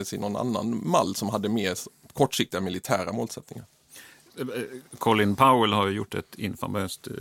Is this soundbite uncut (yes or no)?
yes